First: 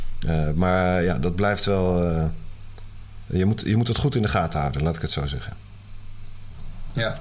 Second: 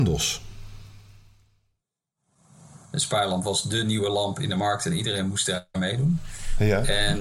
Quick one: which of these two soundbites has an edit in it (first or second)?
second